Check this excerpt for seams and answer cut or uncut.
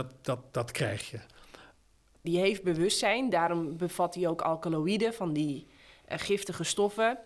cut